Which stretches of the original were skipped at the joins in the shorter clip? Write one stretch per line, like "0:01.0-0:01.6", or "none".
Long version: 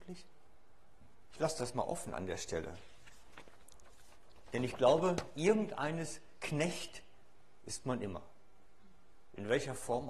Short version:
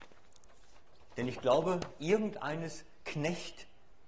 none